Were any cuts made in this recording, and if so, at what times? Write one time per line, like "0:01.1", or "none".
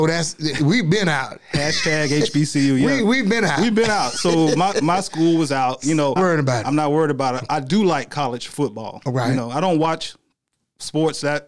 0:06.2